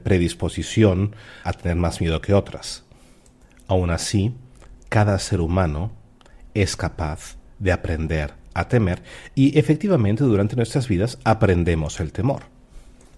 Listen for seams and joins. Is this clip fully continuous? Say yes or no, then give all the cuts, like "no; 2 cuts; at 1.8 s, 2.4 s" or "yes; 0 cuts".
no; 1 cut; at 1.4 s